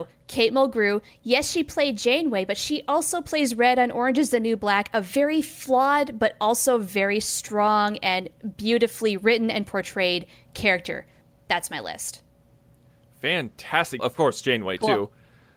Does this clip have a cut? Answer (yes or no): yes